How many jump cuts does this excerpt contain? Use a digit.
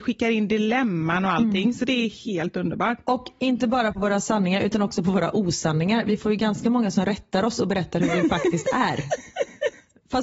0